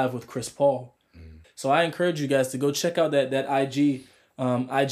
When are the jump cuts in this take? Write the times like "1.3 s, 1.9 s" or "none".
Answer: 1.4 s